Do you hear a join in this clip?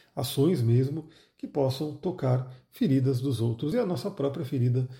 no; 0 cuts

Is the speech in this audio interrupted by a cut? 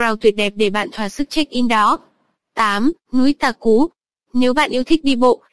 yes; 1 cut; at 3.0 s

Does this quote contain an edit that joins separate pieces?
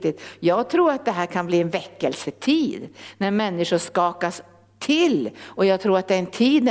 no; 0 cuts

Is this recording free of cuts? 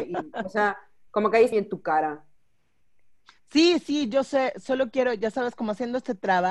no; 1 cut; at 1.5 s

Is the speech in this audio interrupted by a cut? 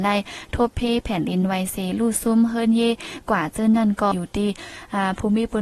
yes; 1 cut; at 4.1 s

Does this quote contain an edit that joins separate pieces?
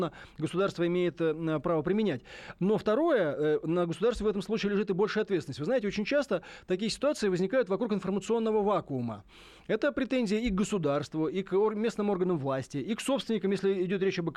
no; 0 cuts

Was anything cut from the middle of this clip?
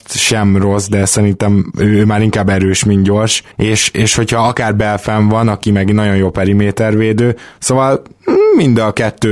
yes; 1 cut; at 3.5 s

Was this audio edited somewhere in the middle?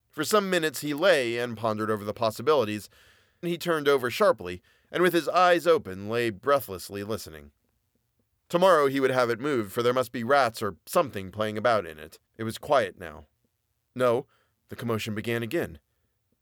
yes; 3 cuts; at 3.4 s, 8.4 s, 12.3 s

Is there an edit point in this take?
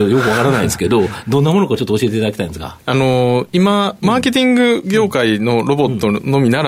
yes; 1 cut; at 2.8 s

